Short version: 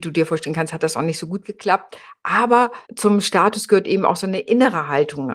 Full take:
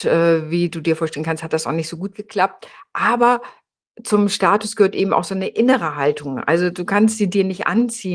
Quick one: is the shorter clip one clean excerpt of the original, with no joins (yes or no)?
no